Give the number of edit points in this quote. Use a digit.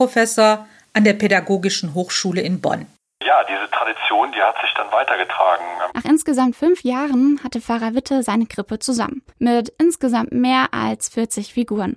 2